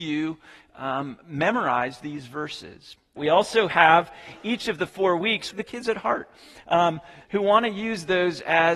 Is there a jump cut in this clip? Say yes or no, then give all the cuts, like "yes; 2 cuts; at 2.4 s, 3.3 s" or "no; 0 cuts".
yes; 3 cuts; at 3.2 s, 5.5 s, 7.2 s